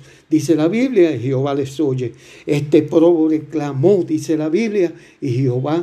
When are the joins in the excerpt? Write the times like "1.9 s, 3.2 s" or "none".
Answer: none